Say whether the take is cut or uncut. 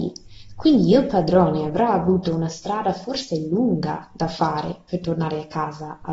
uncut